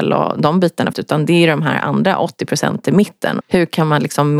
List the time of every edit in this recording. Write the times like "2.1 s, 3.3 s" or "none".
0.9 s, 3.4 s